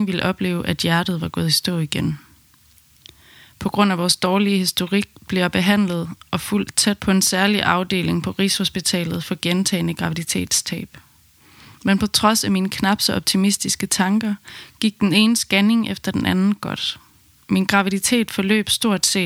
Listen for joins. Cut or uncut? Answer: cut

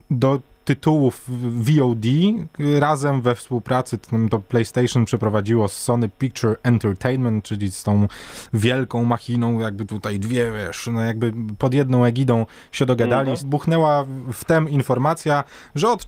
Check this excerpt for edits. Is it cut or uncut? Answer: cut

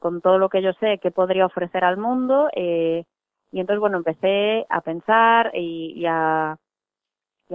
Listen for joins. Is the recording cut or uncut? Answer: uncut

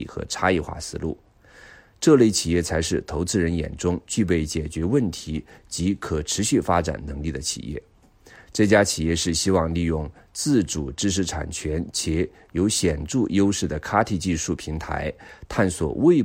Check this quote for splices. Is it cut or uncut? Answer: uncut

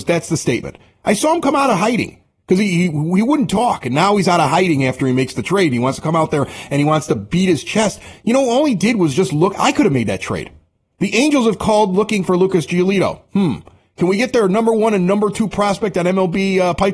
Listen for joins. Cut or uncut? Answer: uncut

